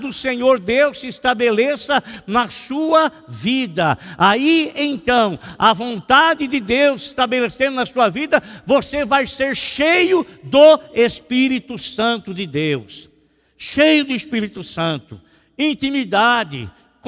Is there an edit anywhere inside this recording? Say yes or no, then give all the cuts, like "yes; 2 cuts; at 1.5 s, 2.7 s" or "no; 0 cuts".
no; 0 cuts